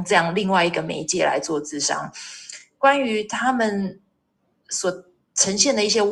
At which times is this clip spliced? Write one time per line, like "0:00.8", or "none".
none